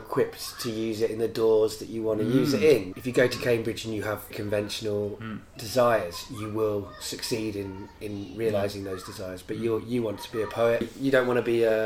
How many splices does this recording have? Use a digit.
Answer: 2